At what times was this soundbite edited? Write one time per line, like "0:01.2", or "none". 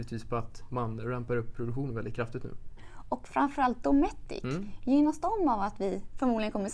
0:02.8